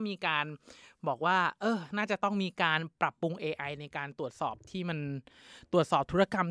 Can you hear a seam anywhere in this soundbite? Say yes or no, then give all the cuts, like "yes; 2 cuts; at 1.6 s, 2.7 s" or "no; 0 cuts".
no; 0 cuts